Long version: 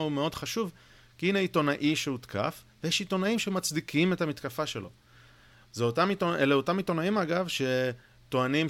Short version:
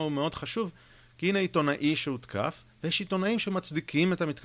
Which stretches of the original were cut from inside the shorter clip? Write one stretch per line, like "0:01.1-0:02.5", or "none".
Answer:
none